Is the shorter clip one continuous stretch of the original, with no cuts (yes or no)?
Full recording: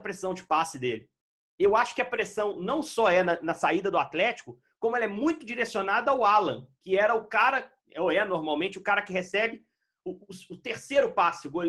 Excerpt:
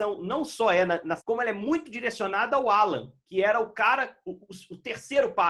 no